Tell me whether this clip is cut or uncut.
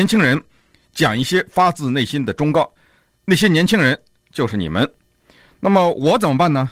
uncut